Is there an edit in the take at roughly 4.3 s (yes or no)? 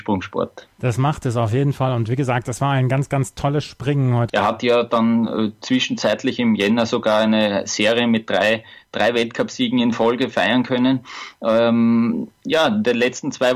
yes